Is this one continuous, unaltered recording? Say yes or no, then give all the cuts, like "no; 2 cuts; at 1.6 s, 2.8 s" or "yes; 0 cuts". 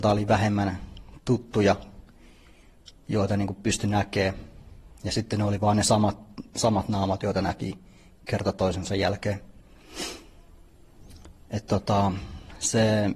yes; 0 cuts